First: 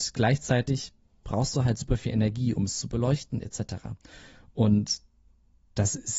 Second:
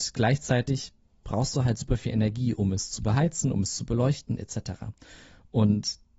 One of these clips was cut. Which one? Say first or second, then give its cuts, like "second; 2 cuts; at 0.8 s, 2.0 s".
first; 1 cut; at 2.6 s